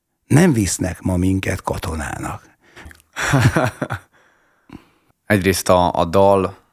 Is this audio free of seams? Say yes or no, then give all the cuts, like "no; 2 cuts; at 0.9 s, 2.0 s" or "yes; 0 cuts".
no; 2 cuts; at 2.8 s, 5.1 s